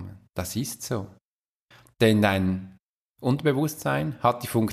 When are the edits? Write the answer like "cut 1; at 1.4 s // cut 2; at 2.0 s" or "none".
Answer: none